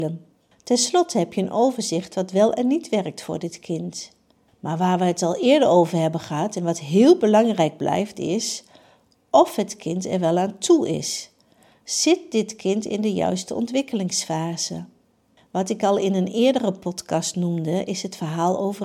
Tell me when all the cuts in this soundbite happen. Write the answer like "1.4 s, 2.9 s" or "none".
none